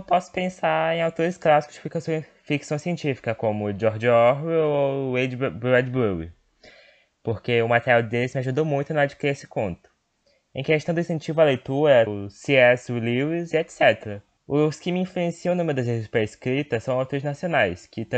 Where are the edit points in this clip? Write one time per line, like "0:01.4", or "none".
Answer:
0:12.1
0:14.4